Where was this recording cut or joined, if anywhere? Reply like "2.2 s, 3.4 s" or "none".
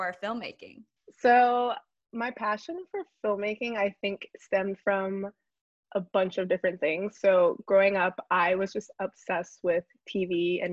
8.9 s